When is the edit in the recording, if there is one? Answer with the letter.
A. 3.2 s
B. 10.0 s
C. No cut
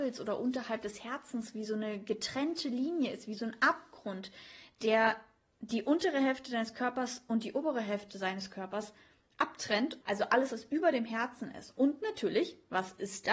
B